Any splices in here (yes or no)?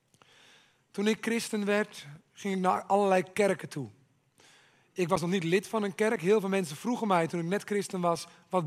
no